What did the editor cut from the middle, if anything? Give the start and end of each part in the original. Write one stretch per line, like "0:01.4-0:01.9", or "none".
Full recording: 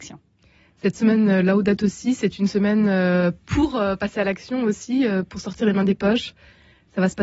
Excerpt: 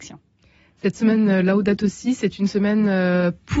none